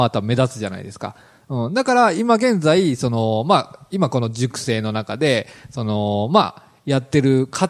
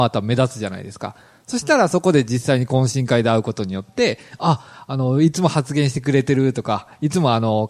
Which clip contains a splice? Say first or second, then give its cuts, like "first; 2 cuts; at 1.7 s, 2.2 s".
first; 1 cut; at 1.4 s